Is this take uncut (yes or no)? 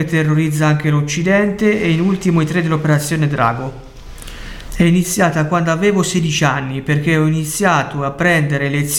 no